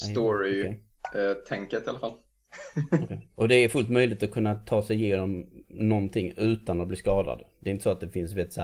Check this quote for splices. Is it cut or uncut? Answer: uncut